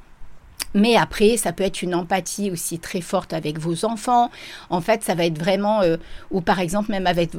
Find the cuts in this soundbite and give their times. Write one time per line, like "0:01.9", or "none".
none